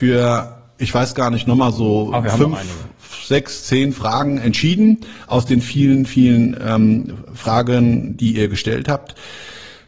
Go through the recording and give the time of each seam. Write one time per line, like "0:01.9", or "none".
none